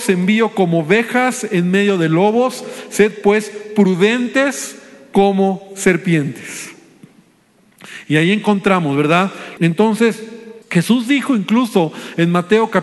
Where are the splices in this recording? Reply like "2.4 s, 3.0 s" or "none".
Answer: 9.6 s, 10.6 s